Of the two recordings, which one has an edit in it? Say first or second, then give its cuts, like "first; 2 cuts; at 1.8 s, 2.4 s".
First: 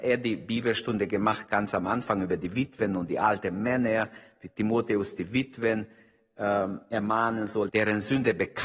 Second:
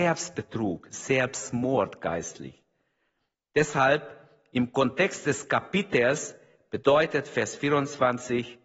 first; 1 cut; at 7.7 s